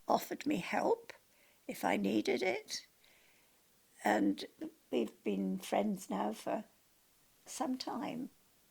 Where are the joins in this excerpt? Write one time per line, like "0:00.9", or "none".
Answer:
0:07.5

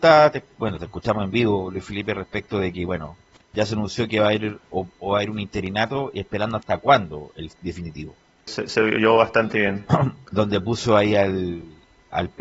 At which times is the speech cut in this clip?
0:08.5

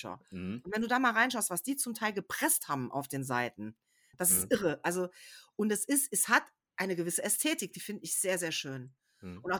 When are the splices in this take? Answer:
none

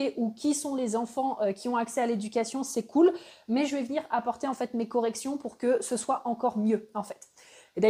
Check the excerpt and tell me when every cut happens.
none

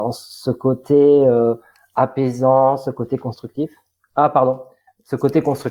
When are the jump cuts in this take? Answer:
none

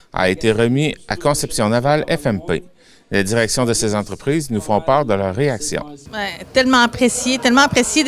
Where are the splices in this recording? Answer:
none

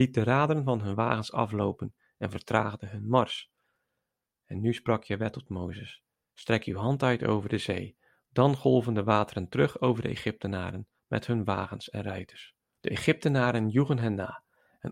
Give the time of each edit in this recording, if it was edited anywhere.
0:04.3
0:12.8

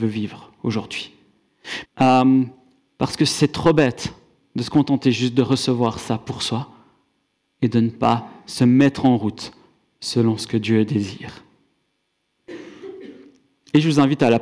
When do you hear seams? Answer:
0:01.8

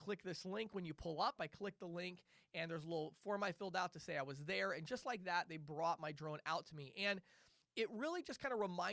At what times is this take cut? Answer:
0:01.4

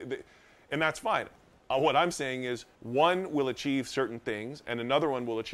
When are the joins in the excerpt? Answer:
0:01.6
0:02.7

